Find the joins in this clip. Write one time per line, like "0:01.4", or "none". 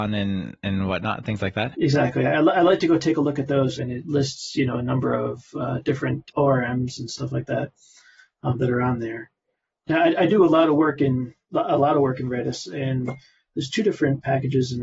0:03.8